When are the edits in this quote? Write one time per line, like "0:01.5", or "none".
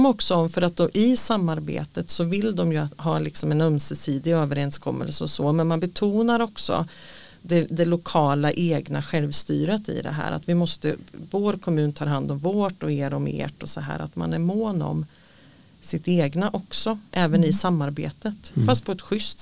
none